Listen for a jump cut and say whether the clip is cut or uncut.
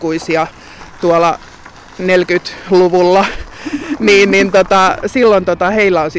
cut